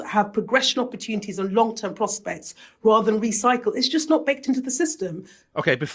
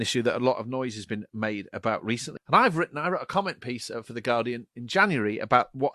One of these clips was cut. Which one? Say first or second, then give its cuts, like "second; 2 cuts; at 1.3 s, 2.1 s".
second; 1 cut; at 2.4 s